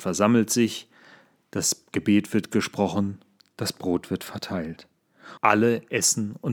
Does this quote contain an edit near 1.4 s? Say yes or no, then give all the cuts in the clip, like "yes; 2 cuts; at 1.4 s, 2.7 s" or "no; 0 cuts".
no; 1 cut; at 5.4 s